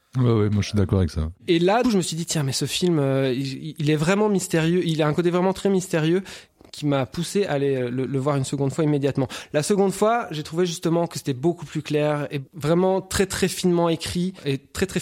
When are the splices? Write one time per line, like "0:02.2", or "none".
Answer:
0:01.8